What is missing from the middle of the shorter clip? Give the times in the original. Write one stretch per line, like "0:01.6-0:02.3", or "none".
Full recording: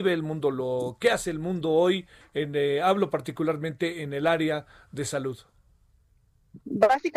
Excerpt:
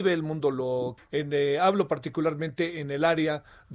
0:01.0-0:02.2